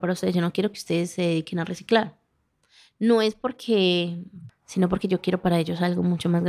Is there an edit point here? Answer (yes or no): yes